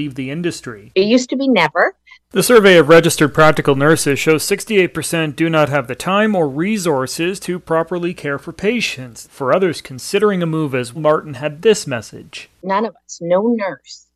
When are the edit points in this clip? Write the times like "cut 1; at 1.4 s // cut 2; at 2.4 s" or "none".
cut 1; at 2.2 s // cut 2; at 9.2 s // cut 3; at 10.9 s